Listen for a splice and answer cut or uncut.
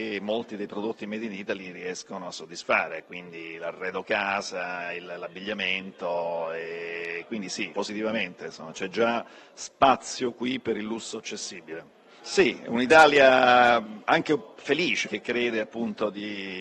cut